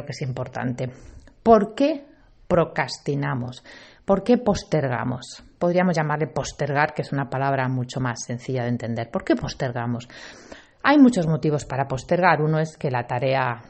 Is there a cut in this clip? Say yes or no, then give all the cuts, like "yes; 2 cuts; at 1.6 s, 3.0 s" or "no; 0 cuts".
no; 0 cuts